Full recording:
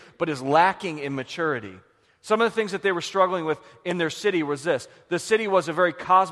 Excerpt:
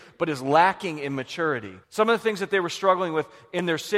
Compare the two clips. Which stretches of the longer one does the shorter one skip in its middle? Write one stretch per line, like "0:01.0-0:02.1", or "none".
0:01.8-0:02.2

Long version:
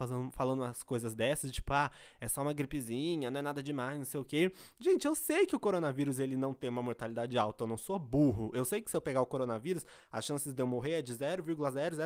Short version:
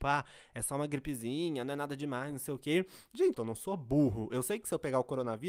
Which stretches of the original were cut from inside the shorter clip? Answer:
0:05.0-0:07.6

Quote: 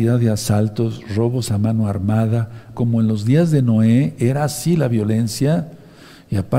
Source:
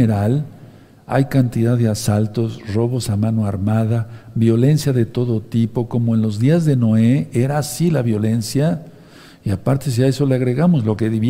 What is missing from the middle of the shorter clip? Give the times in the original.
0:04.3-0:05.9

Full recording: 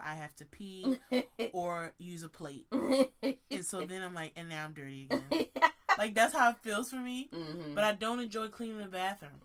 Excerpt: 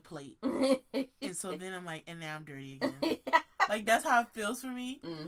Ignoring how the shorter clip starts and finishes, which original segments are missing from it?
none

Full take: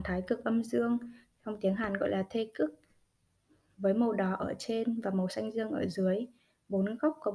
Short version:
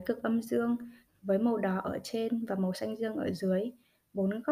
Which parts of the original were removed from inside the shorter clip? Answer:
0:01.3-0:03.6

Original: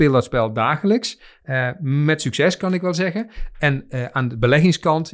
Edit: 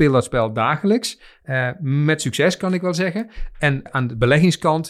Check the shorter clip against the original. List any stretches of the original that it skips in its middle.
0:03.9-0:04.1

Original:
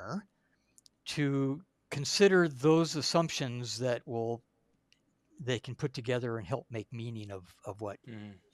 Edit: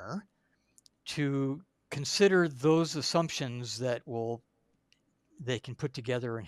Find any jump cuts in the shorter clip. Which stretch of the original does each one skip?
none

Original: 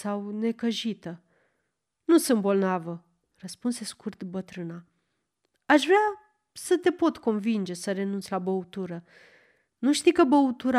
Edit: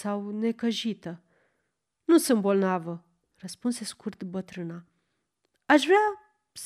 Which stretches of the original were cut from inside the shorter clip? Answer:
none

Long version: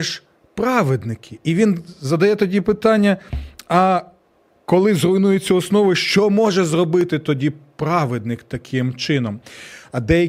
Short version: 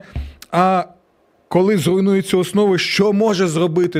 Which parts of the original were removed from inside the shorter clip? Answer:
none

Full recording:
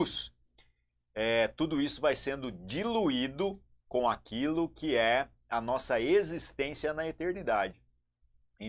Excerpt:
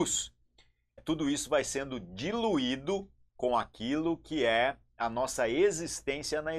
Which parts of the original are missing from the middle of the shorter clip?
0:01.0-0:01.5

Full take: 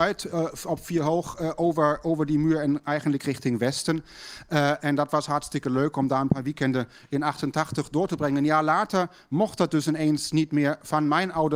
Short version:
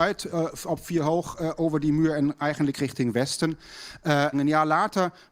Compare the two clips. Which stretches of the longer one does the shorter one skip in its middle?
0:01.6-0:02.0
0:04.8-0:08.3

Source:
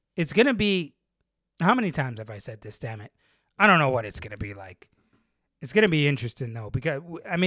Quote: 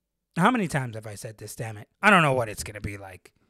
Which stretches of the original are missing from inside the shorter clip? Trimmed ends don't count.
0:03.2-0:03.5

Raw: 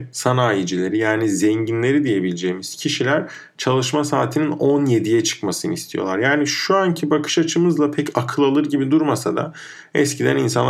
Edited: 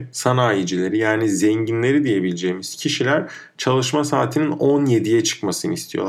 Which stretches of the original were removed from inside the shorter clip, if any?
none

